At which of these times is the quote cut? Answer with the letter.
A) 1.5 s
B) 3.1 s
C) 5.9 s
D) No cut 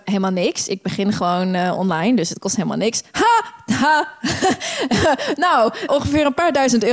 C